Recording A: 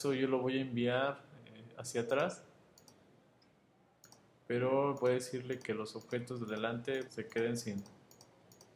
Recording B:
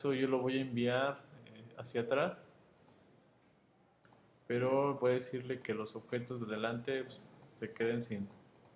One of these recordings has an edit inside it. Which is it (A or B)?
A